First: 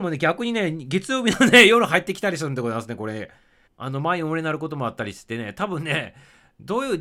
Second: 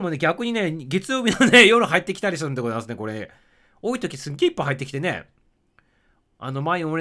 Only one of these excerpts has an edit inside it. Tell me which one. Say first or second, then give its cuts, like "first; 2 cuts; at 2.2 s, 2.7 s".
first; 1 cut; at 3.7 s